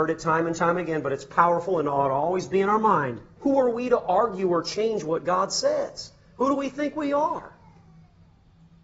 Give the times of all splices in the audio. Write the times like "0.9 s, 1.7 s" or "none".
3.4 s